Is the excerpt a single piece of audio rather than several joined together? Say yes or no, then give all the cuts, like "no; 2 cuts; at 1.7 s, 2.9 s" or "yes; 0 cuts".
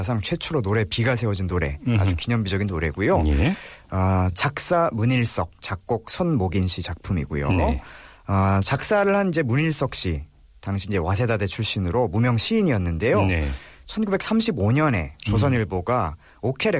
yes; 0 cuts